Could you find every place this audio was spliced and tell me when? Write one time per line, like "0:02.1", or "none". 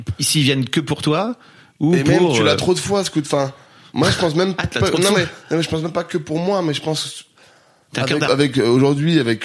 0:08.3